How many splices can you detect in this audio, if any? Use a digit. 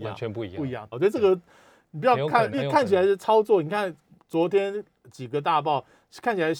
2